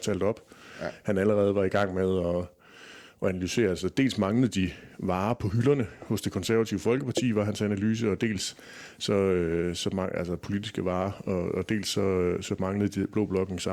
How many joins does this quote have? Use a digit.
0